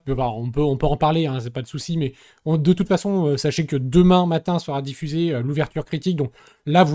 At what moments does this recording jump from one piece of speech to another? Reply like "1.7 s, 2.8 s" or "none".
none